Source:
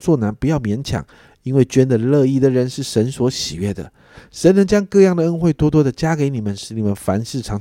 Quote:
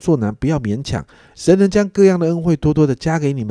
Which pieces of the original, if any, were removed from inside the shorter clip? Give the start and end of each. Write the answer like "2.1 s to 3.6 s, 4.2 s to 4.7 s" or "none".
1.3 s to 4.3 s